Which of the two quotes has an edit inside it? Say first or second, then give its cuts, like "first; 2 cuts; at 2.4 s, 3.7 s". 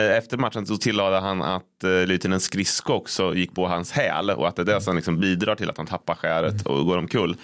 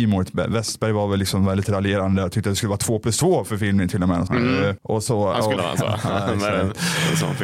second; 2 cuts; at 4.3 s, 5.6 s